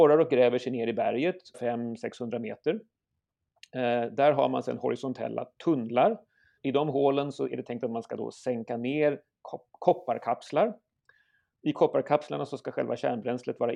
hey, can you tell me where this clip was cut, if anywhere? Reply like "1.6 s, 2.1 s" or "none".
1.5 s, 6.6 s